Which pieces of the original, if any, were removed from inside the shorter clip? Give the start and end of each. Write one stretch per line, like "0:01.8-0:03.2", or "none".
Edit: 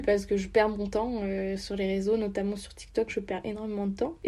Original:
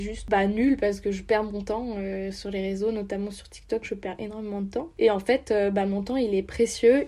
none